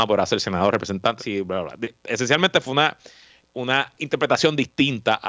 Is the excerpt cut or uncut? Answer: cut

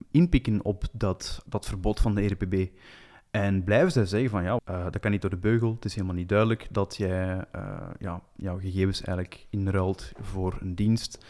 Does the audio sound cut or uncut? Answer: cut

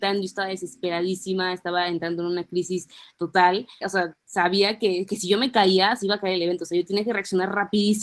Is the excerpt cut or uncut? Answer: cut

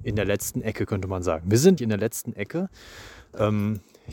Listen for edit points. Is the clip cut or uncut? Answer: cut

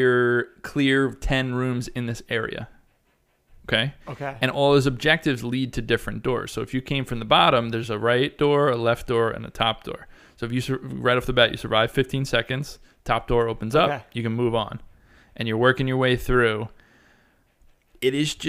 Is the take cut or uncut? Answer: uncut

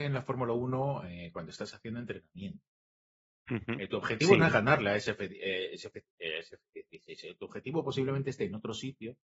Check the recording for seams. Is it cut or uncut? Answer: uncut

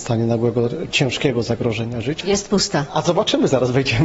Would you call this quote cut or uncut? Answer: cut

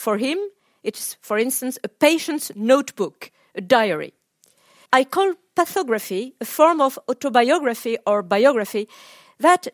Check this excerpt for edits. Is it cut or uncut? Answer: cut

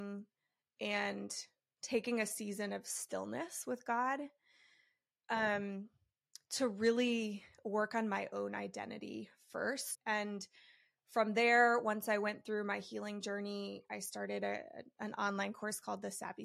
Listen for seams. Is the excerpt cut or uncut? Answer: cut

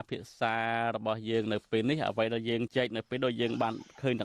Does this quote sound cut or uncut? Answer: cut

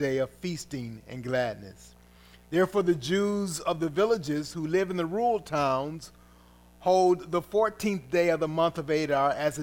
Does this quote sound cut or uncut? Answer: uncut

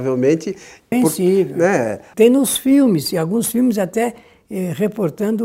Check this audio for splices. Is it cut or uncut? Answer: cut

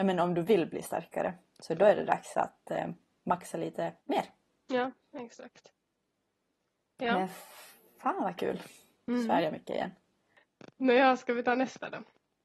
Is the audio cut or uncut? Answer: cut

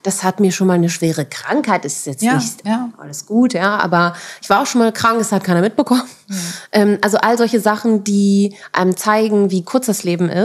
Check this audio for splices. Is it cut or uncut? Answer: cut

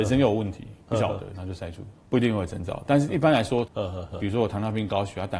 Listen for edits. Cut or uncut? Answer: cut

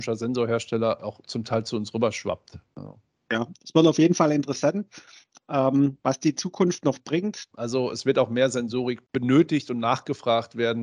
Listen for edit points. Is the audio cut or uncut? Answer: cut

